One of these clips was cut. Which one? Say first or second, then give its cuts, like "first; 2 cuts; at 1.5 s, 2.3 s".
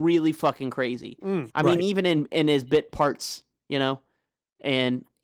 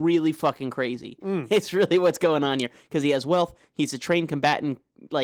first; 1 cut; at 1.5 s